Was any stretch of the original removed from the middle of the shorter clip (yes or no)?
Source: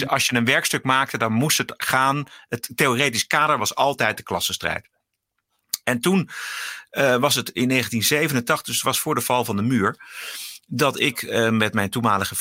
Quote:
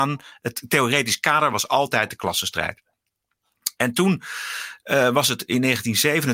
no